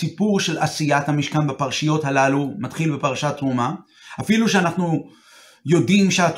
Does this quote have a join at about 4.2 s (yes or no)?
no